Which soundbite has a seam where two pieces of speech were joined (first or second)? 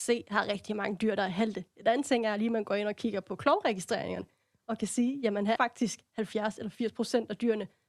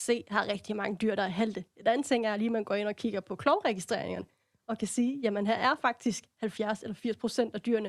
first